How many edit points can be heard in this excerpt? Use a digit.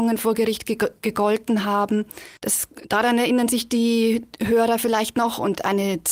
1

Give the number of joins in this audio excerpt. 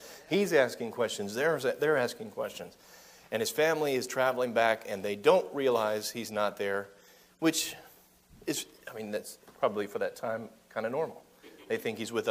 0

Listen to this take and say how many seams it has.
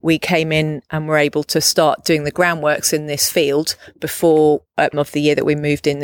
1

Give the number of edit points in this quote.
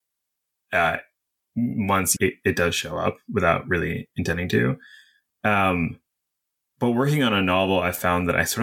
1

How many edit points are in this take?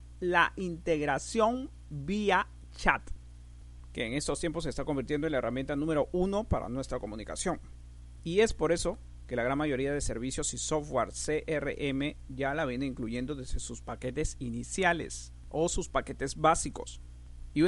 1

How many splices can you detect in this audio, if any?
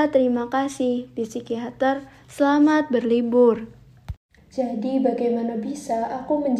1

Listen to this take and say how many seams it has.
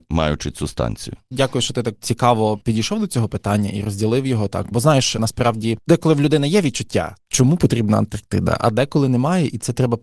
0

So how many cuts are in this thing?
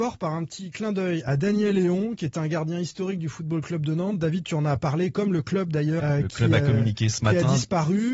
1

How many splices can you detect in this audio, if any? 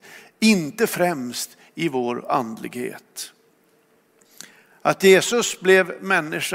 0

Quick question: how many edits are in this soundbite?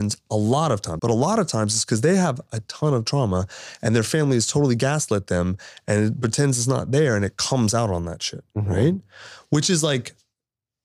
1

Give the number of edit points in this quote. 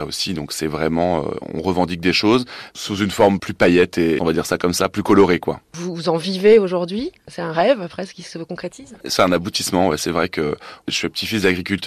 1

